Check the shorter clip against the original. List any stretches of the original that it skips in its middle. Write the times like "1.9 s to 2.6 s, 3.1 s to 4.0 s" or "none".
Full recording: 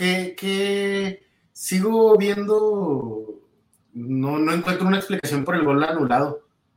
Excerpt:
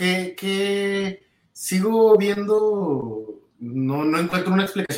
3.5 s to 3.8 s

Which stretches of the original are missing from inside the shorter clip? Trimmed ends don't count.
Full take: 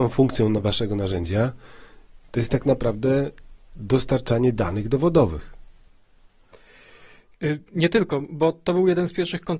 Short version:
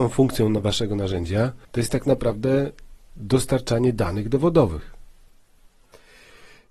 1.6 s to 2.2 s

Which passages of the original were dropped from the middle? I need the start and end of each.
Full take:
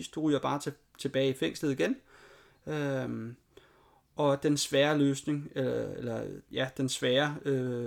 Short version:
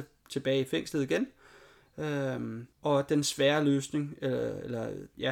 3.4 s to 4.1 s

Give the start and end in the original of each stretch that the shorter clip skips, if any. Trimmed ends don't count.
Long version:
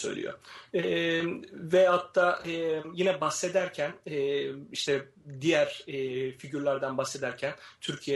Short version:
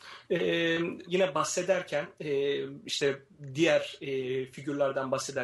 1.5 s to 2.9 s

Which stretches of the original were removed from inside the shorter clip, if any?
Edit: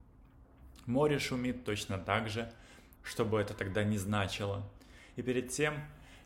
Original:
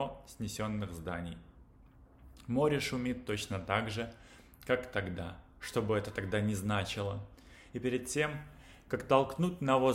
4.6 s to 5.5 s

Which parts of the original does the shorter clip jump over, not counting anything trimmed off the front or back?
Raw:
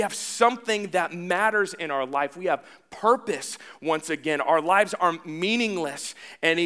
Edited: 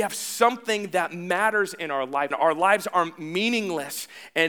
2.3 s to 4.4 s

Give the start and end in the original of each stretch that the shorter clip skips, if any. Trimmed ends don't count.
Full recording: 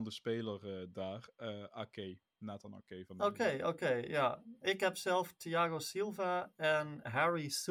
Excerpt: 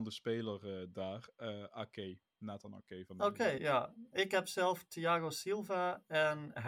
3.6 s to 4.1 s

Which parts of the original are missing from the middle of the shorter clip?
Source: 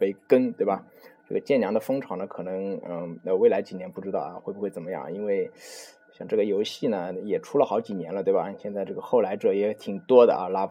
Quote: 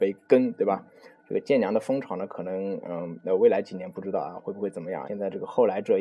5.1 s to 8.6 s

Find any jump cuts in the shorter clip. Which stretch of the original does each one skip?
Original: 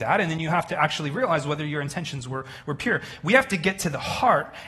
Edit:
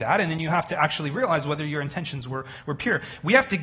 none

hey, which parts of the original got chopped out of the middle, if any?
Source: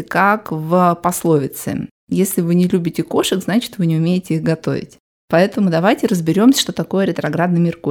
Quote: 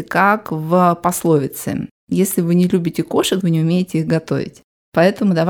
3.4 s to 3.8 s

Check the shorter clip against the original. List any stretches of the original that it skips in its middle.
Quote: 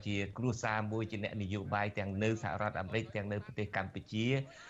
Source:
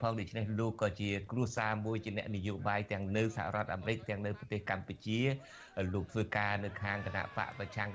none

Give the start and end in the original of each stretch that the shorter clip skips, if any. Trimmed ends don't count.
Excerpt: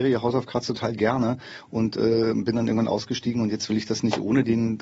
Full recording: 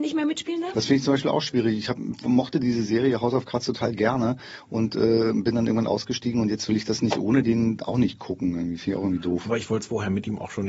none

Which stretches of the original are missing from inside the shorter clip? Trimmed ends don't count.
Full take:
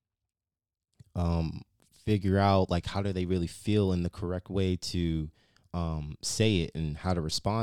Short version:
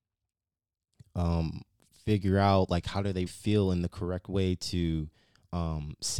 3.3 s to 3.5 s

